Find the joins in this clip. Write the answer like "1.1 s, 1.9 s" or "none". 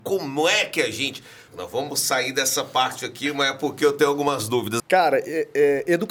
1.5 s, 4.8 s